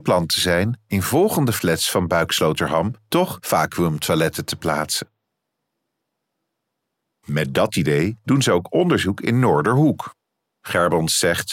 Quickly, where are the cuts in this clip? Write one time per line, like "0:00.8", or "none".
0:07.1